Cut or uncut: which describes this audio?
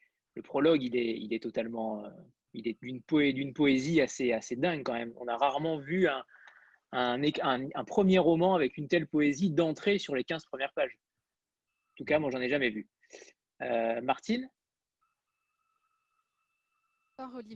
uncut